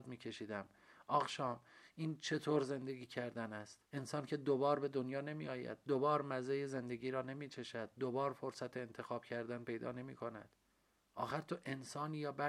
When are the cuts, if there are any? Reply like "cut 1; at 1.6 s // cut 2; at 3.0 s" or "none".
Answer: cut 1; at 3.9 s